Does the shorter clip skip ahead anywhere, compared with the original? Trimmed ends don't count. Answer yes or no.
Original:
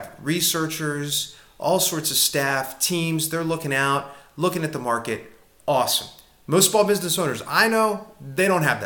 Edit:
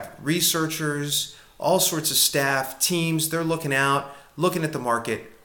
no